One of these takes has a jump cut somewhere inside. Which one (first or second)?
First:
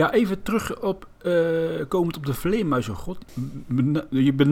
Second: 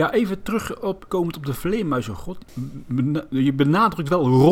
second